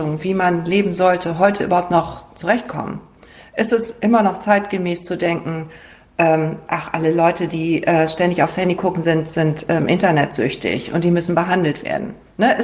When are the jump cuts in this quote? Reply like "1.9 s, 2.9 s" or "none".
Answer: none